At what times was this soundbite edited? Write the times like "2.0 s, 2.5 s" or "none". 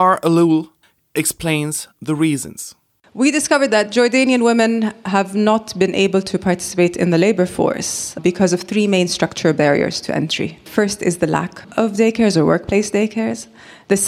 none